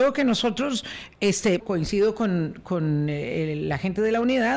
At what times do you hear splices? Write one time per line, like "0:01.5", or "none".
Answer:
0:01.6